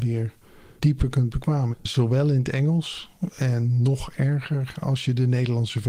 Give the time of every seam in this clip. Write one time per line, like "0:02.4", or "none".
0:01.7